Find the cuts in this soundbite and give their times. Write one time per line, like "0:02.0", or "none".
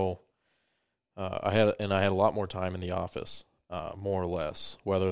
0:03.6